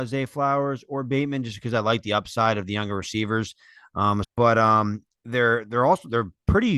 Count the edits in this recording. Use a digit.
1